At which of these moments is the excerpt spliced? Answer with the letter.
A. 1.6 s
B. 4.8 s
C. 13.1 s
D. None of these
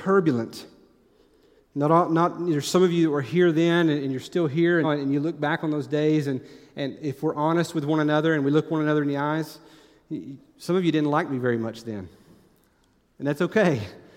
B